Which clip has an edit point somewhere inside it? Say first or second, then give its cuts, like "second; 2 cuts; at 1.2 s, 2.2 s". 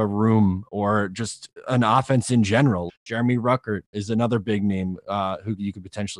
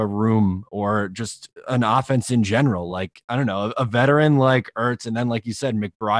first; 1 cut; at 2.9 s